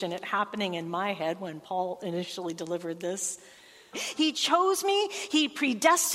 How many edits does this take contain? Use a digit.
1